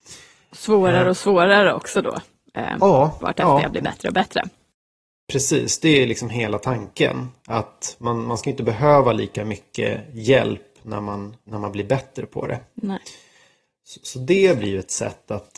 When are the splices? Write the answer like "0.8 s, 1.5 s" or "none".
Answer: 11.5 s